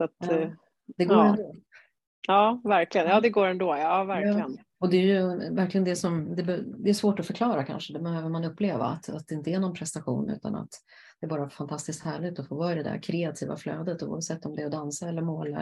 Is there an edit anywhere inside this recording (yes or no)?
no